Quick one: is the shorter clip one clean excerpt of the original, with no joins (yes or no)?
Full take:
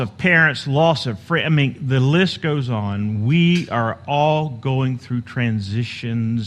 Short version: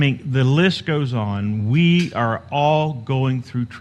yes